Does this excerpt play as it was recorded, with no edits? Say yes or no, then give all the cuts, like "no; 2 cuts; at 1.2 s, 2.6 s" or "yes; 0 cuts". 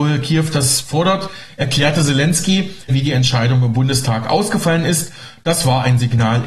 no; 1 cut; at 2.9 s